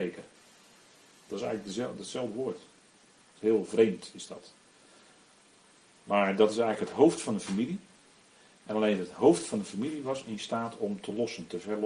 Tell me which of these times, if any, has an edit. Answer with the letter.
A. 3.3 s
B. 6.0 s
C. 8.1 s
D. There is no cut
D